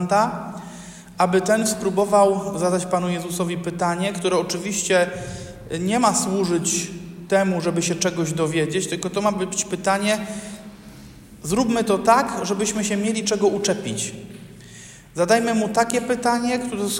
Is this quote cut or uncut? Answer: uncut